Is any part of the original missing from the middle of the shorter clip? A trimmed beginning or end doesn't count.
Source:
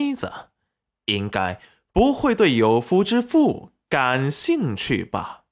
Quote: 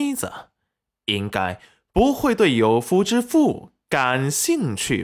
no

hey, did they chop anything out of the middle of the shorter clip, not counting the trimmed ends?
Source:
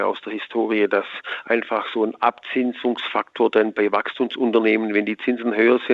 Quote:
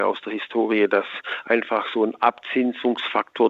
no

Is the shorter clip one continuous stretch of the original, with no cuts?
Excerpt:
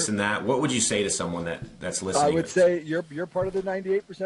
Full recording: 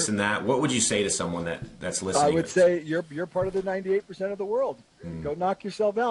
yes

